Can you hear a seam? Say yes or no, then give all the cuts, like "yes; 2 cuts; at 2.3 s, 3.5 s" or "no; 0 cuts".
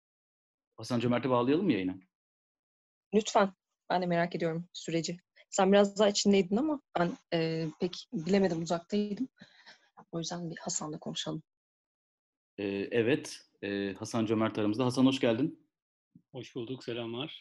no; 0 cuts